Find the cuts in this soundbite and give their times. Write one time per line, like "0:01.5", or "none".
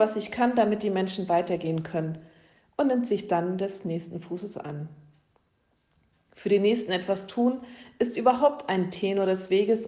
none